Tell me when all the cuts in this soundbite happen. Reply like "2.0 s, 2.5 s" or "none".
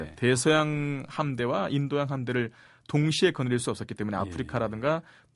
none